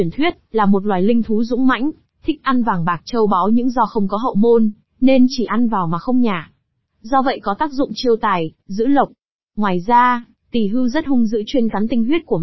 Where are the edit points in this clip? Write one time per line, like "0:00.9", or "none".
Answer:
none